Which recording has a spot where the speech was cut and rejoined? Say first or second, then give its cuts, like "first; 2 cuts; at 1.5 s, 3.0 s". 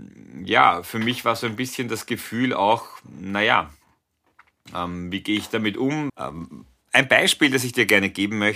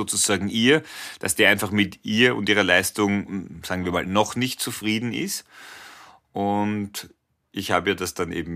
first; 1 cut; at 6.1 s